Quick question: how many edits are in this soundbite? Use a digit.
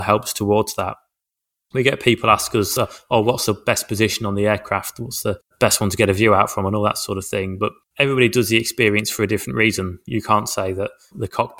0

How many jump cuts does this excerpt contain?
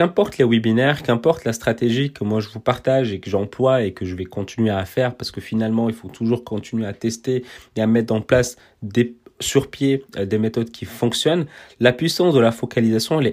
0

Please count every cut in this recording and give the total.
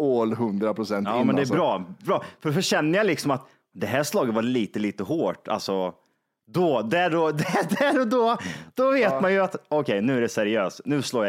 0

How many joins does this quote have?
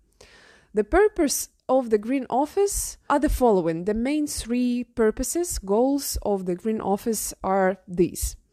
1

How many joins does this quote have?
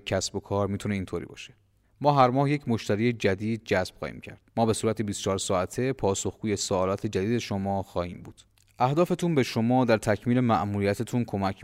2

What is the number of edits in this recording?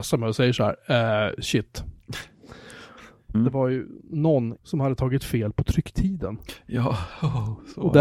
2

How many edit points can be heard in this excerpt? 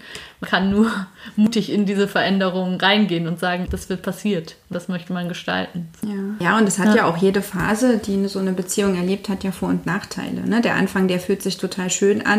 1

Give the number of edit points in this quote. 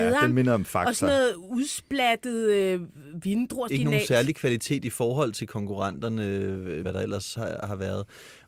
2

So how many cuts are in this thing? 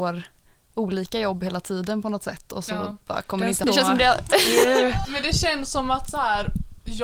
2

